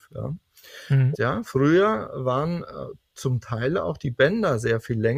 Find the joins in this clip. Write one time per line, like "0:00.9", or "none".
0:01.1